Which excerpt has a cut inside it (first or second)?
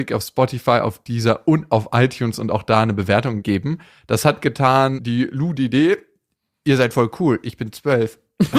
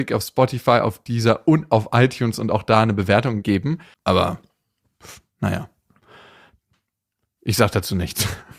second